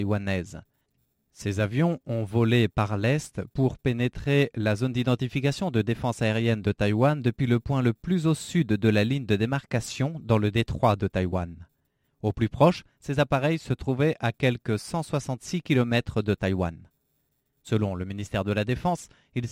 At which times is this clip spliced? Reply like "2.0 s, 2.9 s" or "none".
none